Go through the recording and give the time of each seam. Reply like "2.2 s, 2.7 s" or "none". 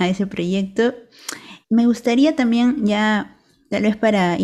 1.6 s